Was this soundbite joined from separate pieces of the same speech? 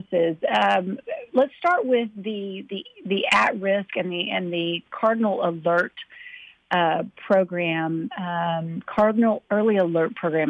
no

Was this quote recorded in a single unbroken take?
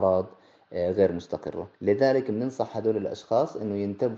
no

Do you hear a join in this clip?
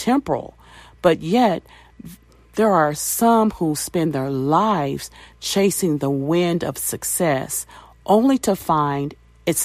no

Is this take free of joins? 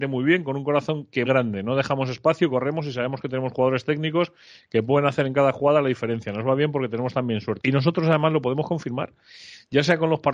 no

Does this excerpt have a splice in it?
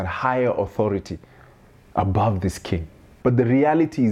yes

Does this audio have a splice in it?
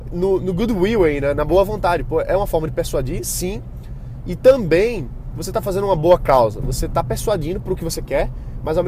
no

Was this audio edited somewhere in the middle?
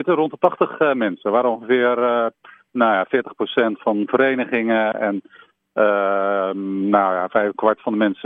no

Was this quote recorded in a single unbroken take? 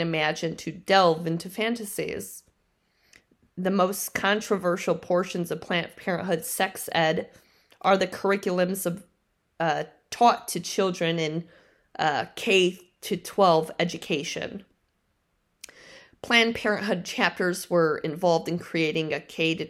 yes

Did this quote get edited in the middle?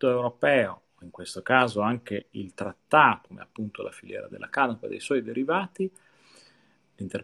yes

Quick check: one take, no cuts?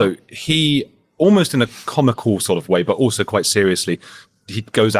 yes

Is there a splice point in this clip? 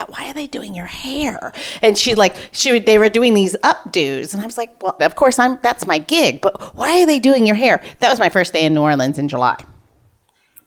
yes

